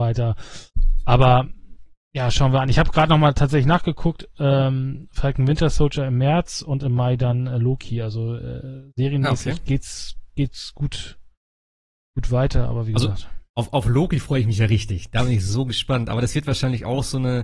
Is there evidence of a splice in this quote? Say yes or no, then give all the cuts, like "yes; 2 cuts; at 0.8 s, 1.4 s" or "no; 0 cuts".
no; 0 cuts